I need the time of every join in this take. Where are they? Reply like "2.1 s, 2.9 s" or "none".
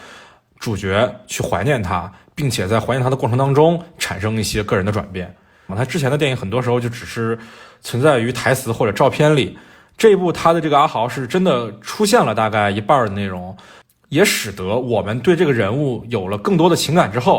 5.7 s